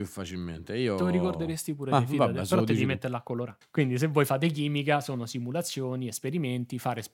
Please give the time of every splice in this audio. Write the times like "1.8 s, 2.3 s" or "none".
3.6 s